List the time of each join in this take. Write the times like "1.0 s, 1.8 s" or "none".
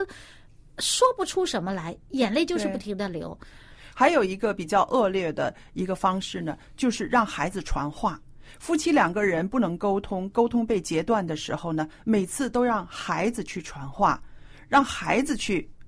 none